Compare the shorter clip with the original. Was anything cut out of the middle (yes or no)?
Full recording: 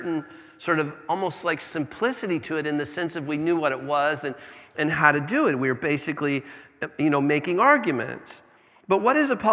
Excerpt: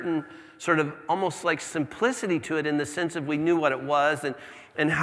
no